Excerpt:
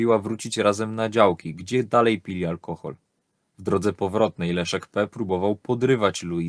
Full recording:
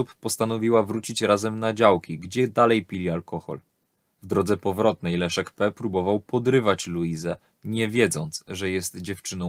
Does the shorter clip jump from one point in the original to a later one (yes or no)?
no